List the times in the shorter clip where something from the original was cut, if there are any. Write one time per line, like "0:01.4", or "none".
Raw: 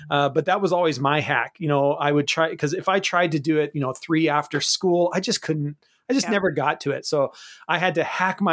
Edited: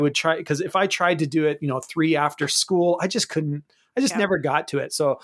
none